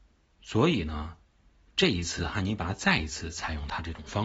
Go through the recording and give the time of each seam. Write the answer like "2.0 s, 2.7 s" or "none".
none